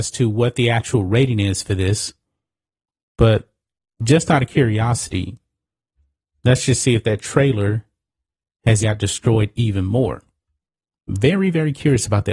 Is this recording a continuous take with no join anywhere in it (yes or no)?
no